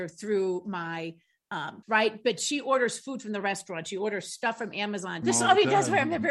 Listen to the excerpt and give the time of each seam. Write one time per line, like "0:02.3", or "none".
0:01.8
0:05.2